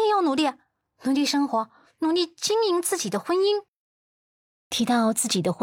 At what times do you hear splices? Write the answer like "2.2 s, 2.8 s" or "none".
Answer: none